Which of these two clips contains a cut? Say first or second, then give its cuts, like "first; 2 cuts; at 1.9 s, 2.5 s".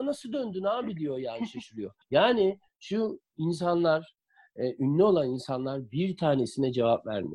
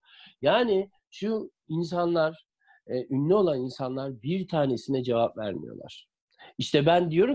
first; 1 cut; at 2.0 s